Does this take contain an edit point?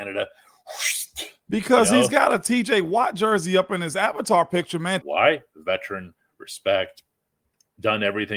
yes; 1 cut; at 5.0 s

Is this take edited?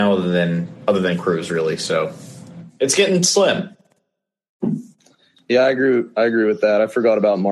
no; 0 cuts

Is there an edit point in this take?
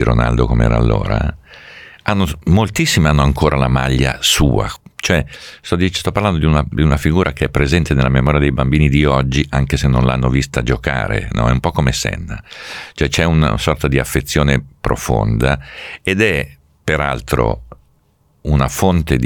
no; 0 cuts

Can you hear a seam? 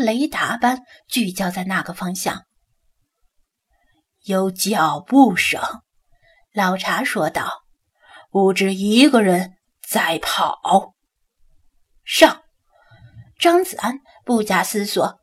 no; 0 cuts

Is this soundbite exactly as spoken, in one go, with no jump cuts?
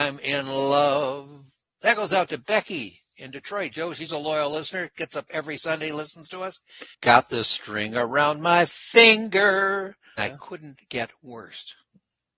no; 2 cuts; at 6.9 s, 10.2 s

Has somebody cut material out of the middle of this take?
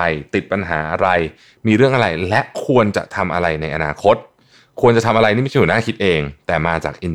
no; 0 cuts

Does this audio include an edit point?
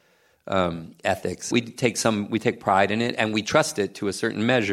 yes; 1 cut; at 1.5 s

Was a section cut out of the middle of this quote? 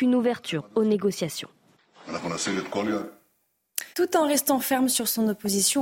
yes; 1 cut; at 3.9 s

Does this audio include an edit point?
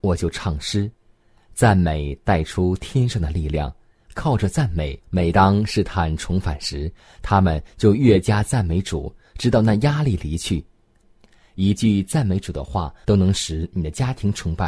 yes; 3 cuts; at 5.0 s, 11.0 s, 13.0 s

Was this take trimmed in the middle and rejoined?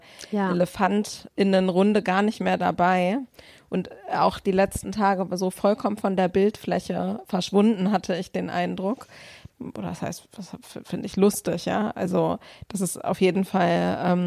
yes; 1 cut; at 9.5 s

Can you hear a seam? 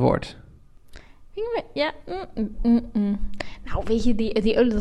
no; 0 cuts

